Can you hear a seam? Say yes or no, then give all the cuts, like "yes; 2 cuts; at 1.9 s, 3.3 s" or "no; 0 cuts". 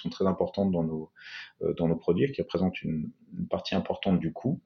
no; 0 cuts